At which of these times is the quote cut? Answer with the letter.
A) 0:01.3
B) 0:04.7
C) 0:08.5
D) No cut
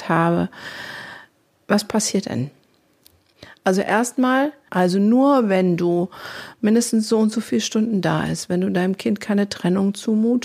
B